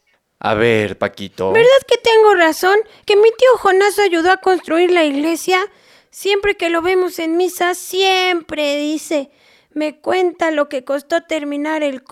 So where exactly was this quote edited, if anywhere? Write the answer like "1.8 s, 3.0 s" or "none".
none